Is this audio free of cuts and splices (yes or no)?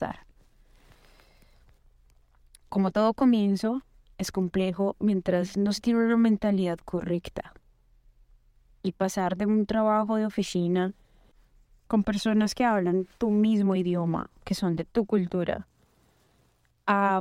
yes